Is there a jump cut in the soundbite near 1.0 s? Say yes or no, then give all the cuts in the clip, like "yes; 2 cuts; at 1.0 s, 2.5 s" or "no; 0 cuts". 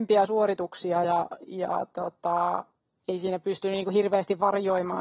no; 0 cuts